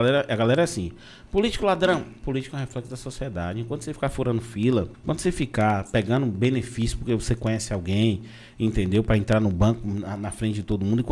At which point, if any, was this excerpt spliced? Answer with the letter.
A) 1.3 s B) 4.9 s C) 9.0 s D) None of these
B